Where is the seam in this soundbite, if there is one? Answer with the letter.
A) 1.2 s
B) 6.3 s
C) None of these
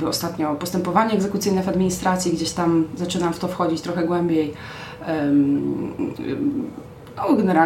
C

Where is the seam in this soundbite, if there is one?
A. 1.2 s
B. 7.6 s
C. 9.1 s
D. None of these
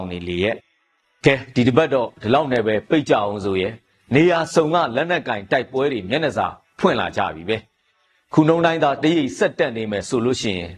C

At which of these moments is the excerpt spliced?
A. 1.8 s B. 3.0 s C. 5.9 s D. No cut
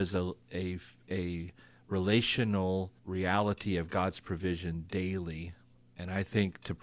B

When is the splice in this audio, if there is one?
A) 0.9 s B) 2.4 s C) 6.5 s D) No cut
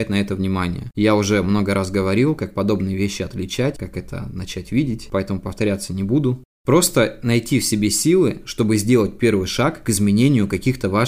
A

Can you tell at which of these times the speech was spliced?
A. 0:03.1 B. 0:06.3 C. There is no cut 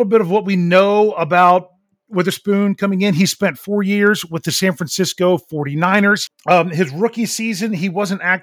B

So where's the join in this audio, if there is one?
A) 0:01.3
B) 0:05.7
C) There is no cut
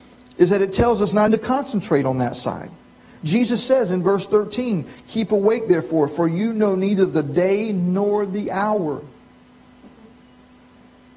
A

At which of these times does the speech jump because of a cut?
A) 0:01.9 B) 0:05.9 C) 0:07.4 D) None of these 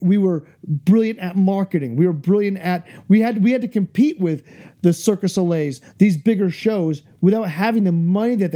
B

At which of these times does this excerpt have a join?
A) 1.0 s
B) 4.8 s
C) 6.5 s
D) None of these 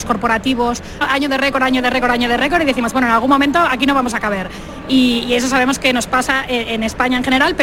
A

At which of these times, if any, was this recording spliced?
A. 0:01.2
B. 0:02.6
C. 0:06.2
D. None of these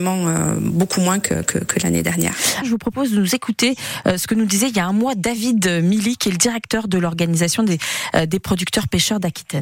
B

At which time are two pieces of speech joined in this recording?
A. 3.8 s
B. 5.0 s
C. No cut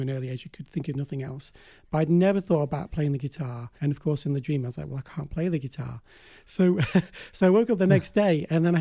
A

